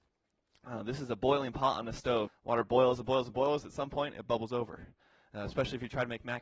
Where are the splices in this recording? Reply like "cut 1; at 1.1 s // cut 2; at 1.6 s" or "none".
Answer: cut 1; at 2.3 s